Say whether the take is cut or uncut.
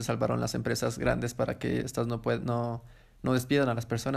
uncut